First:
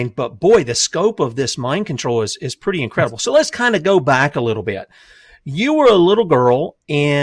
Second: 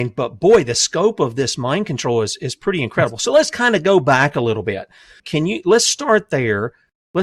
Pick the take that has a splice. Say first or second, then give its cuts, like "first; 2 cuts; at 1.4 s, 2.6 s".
second; 1 cut; at 5.2 s